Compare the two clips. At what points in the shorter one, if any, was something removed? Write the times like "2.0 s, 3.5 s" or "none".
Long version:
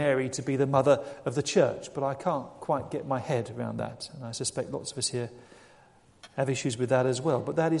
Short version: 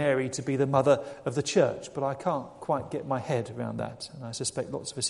none